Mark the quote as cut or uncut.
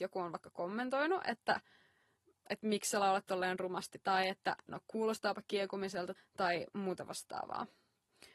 cut